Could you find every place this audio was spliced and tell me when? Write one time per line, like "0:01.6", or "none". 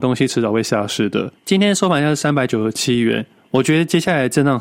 0:01.3